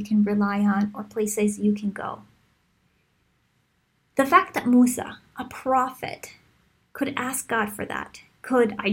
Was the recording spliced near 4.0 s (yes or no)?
no